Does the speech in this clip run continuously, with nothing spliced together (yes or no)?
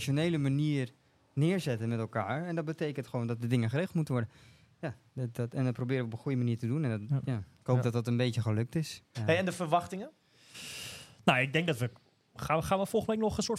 no